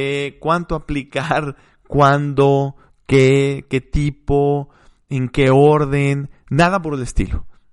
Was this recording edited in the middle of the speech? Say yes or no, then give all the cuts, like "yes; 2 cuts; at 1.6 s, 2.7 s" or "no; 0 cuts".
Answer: no; 0 cuts